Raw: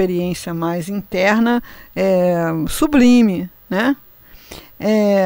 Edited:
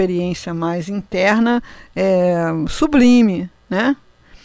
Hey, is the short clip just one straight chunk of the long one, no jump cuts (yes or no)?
yes